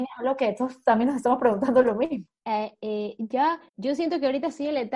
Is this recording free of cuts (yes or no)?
no